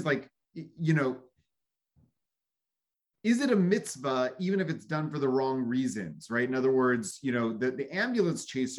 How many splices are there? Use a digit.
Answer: 0